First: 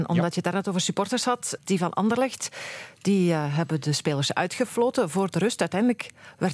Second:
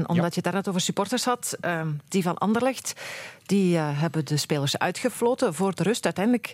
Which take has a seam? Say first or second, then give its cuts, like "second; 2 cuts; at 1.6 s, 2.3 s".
first; 1 cut; at 1.6 s